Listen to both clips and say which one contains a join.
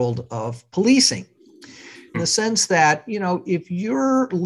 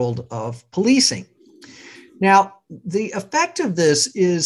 first; 1 cut; at 2.1 s

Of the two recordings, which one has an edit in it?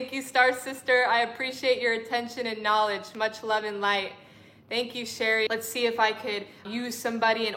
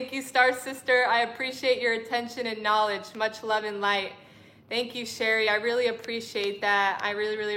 first; 2 cuts; at 5.5 s, 6.6 s

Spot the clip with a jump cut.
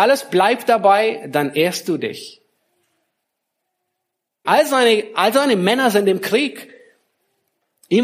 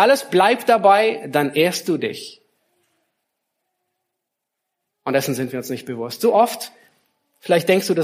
first; 1 cut; at 4.4 s

